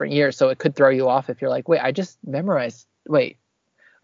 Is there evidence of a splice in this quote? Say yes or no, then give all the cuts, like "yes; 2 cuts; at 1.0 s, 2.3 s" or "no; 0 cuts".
no; 0 cuts